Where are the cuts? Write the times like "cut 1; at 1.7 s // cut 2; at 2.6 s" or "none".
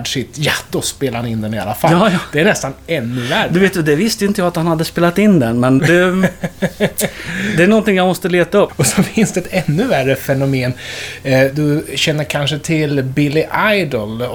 cut 1; at 5.8 s // cut 2; at 8.7 s